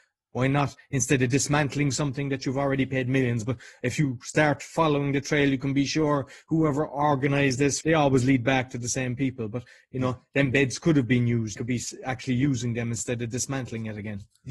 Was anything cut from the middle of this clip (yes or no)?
yes